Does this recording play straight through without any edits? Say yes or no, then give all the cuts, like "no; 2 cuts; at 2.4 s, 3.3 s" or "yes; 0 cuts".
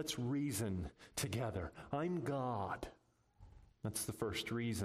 no; 1 cut; at 3.7 s